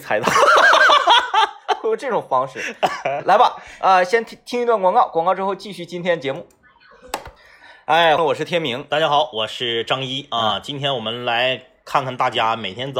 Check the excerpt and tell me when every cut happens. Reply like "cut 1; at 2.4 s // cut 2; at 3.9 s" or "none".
cut 1; at 8.2 s

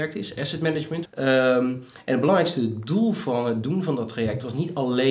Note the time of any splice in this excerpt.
cut 1; at 1.1 s

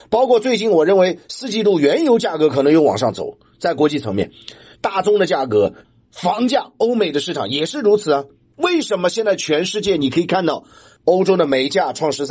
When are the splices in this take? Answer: cut 1; at 8.5 s

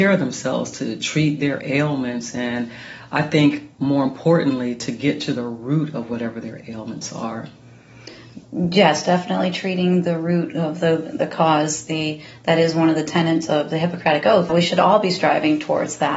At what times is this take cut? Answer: cut 1; at 14.5 s

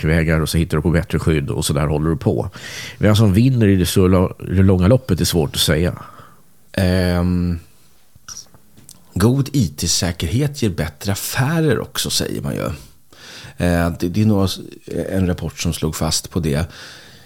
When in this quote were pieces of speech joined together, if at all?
cut 1; at 6.7 s

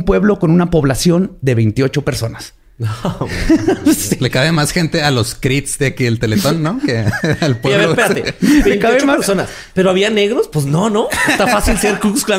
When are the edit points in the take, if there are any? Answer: none

